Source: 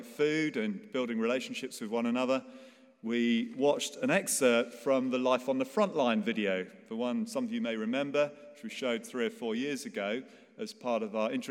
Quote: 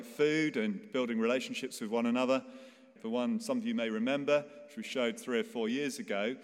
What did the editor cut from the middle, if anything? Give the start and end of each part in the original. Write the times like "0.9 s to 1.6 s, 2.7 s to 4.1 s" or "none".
3.0 s to 6.8 s